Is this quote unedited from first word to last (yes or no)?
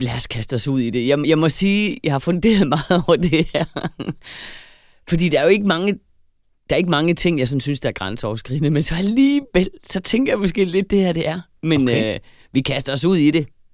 yes